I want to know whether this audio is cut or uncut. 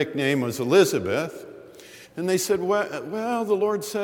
cut